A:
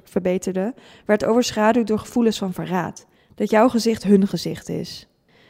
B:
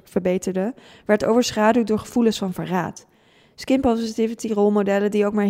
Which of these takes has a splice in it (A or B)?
A